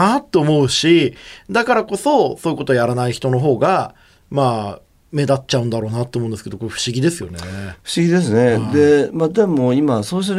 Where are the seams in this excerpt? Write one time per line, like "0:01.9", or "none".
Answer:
none